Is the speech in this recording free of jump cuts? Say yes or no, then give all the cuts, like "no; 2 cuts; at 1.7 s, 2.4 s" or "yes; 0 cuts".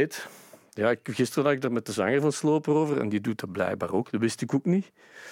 yes; 0 cuts